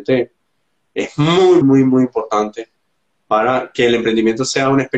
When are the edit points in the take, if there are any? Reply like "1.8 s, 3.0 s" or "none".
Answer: 1.6 s

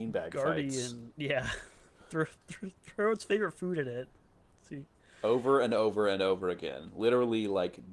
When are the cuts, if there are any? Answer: none

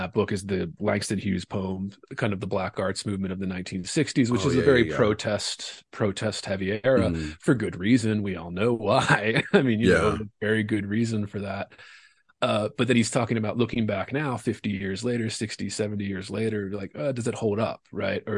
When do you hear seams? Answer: none

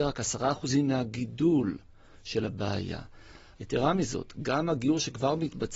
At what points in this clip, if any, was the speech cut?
3.6 s

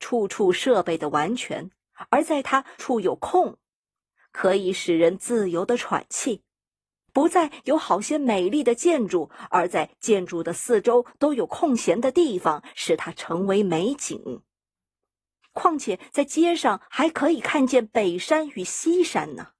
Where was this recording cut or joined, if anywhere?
2.8 s, 15.4 s

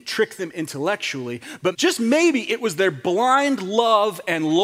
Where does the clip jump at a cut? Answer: 1.7 s

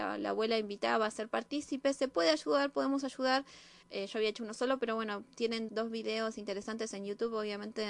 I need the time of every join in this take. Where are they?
3.8 s, 5.7 s

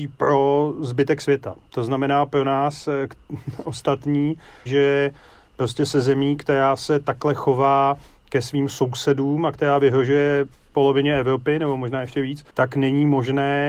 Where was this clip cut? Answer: 4.7 s, 12.5 s

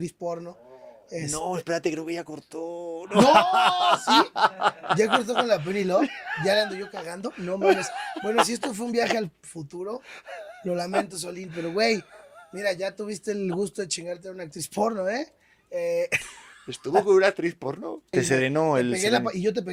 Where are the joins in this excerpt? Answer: 18.1 s

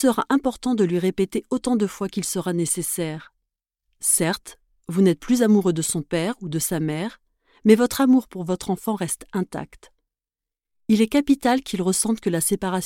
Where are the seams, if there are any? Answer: none

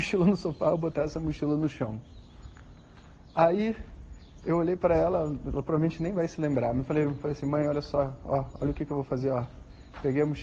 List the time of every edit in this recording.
none

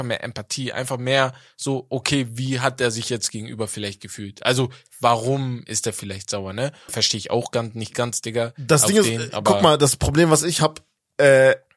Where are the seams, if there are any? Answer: 6.9 s

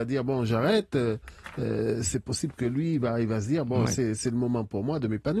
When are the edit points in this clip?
none

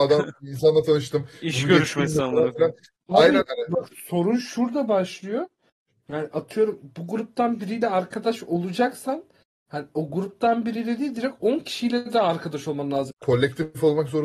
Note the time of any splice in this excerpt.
3.4 s, 13.1 s

